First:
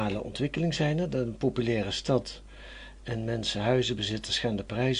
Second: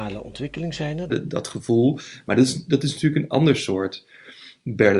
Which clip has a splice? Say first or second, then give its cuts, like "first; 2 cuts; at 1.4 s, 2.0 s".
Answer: second; 1 cut; at 1.1 s